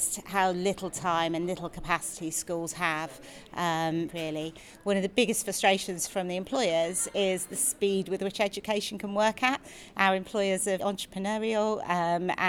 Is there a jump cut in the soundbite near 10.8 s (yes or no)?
yes